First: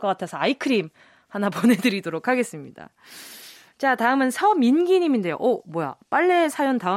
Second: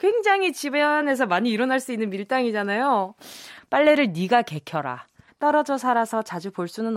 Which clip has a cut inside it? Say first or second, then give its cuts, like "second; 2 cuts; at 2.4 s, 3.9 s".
second; 2 cuts; at 3.6 s, 5.3 s